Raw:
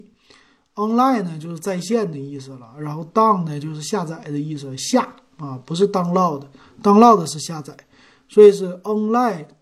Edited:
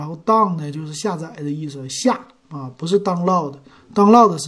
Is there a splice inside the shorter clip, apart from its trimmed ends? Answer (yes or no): no